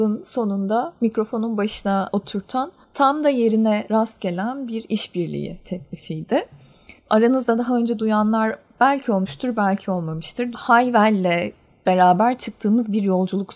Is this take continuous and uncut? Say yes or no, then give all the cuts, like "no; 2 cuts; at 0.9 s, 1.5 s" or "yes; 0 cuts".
no; 1 cut; at 10.5 s